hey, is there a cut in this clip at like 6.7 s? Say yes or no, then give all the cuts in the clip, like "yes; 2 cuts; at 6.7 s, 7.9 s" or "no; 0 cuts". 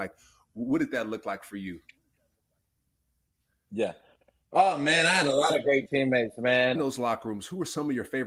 yes; 1 cut; at 6.7 s